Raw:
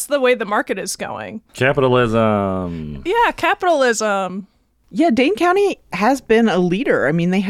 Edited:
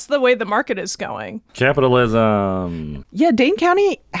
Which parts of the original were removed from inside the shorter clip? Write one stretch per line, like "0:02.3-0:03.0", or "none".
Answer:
0:03.0-0:04.8